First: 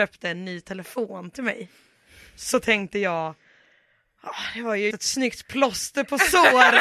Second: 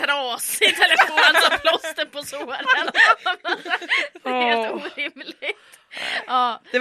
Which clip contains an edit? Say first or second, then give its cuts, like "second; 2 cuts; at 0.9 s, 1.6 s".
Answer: first; 1 cut; at 4.9 s